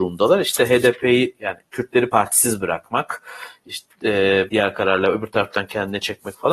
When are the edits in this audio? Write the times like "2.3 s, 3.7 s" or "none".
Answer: 4.5 s